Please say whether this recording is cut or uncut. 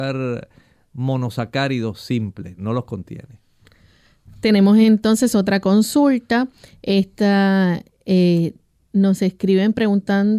uncut